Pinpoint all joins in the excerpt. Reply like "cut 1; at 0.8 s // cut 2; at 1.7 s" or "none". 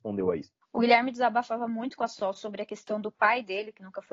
none